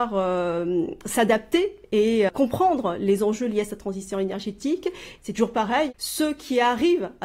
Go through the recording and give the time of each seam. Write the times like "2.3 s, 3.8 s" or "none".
2.3 s